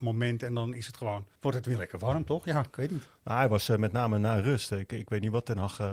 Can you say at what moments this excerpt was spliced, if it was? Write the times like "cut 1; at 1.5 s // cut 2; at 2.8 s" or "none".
cut 1; at 1.3 s